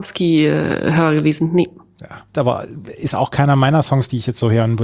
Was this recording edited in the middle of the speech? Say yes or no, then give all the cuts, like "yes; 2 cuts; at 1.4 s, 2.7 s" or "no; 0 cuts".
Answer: yes; 1 cut; at 2.3 s